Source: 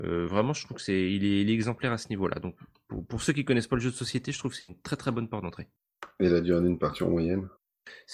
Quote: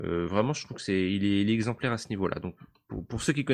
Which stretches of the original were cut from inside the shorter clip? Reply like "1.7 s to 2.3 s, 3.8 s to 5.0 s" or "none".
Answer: none